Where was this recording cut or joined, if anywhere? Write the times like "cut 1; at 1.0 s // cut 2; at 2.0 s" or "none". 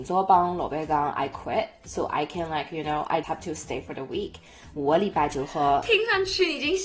cut 1; at 3.2 s